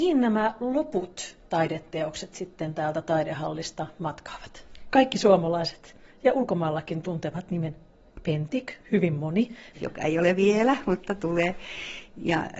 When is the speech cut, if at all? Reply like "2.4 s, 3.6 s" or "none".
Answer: 4.9 s, 9.7 s